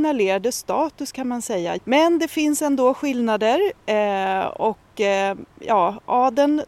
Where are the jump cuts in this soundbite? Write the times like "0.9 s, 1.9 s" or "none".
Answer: 1.8 s